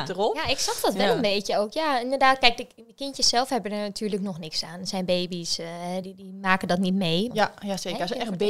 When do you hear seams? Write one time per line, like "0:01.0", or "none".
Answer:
0:06.0
0:07.3